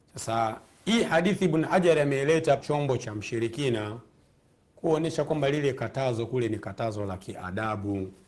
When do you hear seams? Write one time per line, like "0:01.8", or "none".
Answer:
0:02.6